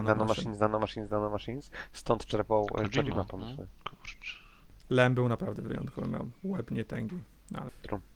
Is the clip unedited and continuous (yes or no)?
yes